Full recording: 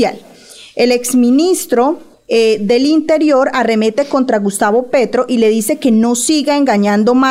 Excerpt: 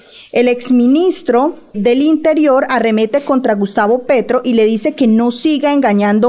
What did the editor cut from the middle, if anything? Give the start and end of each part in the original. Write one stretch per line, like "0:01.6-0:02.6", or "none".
0:02.2-0:02.6